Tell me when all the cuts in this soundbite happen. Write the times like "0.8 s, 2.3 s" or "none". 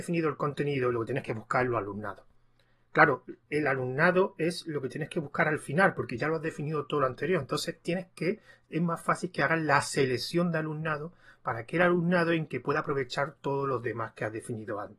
none